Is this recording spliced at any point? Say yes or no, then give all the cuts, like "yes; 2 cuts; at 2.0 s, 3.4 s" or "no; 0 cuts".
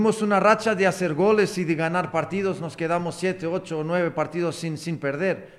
no; 0 cuts